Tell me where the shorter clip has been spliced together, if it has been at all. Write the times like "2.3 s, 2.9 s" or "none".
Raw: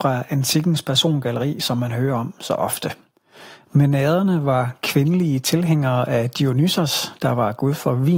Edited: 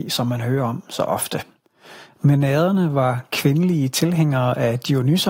none